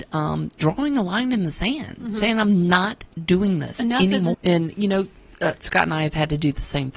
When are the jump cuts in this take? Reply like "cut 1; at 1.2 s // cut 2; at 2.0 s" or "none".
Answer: cut 1; at 4.3 s